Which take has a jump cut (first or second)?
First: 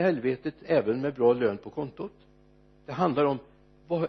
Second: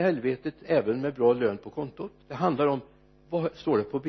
second